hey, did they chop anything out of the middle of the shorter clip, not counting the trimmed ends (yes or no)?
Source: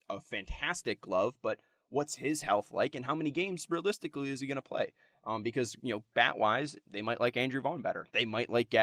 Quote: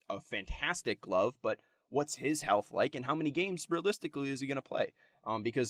no